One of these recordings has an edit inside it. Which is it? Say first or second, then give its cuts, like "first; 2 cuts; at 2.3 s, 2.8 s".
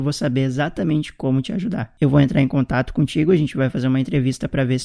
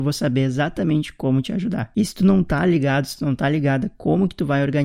second; 1 cut; at 1.9 s